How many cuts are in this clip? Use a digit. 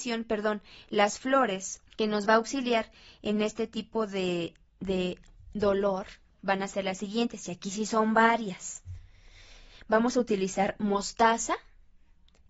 1